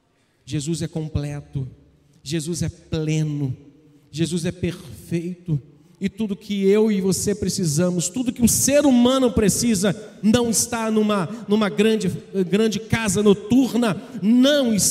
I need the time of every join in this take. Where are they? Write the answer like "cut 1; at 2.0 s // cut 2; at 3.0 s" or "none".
cut 1; at 10.2 s